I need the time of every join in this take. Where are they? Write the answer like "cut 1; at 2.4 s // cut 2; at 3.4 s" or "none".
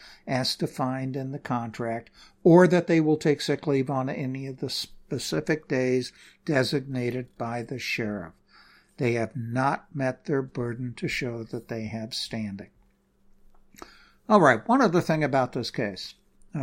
none